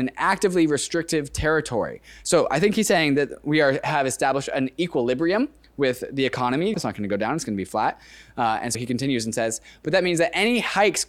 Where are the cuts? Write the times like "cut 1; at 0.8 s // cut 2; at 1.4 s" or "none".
cut 1; at 6.7 s // cut 2; at 8.7 s